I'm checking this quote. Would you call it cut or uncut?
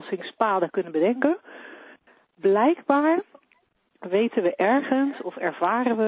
uncut